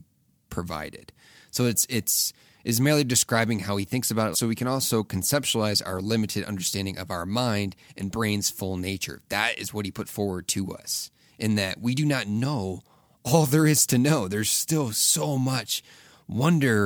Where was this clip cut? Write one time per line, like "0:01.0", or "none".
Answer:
0:04.3